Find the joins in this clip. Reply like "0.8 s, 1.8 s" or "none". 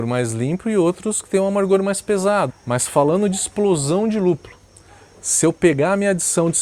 2.5 s